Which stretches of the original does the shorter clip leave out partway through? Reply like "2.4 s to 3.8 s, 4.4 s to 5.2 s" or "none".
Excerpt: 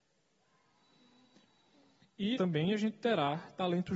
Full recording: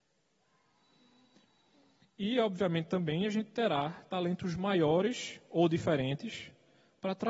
2.3 s to 2.9 s